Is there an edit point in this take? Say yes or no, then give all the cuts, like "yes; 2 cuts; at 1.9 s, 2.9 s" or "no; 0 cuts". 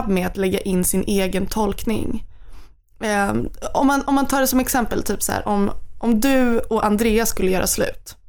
no; 0 cuts